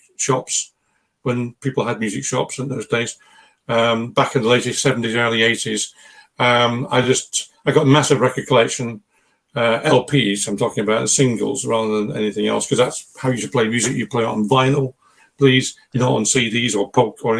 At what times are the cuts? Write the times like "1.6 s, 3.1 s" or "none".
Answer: none